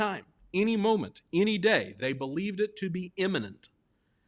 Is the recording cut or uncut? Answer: uncut